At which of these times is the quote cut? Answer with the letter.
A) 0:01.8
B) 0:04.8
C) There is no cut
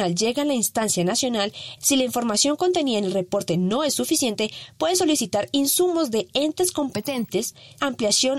A